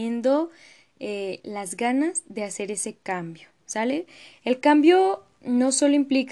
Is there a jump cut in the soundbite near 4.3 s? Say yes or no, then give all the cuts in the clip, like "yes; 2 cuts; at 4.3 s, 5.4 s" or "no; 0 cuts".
yes; 1 cut; at 4.3 s